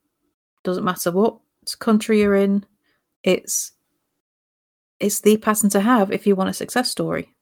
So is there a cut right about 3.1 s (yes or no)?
yes